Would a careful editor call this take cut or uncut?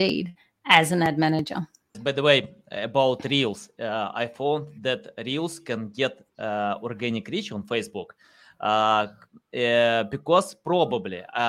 cut